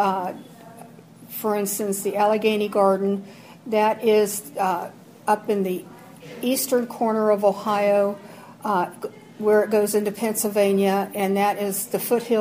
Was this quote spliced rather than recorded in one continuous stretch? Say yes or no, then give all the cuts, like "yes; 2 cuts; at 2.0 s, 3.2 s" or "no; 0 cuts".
no; 0 cuts